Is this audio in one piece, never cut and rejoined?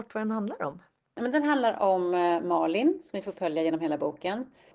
yes; 0 cuts

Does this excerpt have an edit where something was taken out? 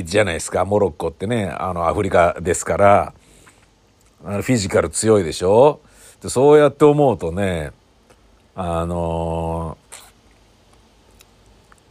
no; 0 cuts

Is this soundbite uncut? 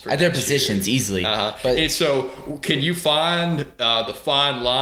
yes; 0 cuts

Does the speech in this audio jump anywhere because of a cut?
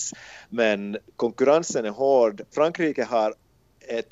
yes; 1 cut; at 2.5 s

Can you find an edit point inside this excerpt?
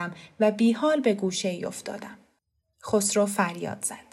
no; 0 cuts

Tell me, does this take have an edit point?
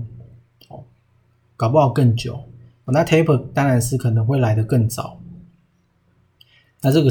yes; 1 cut; at 2.8 s

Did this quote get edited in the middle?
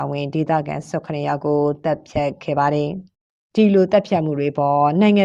no; 0 cuts

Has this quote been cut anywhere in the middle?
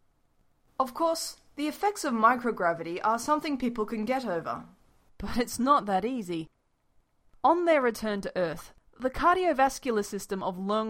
yes; 1 cut; at 5.1 s

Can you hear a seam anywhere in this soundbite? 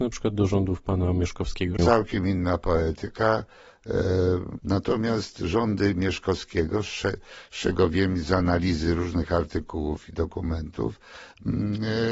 yes; 2 cuts; at 1.8 s, 4.6 s

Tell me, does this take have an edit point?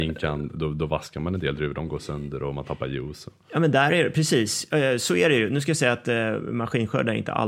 no; 0 cuts

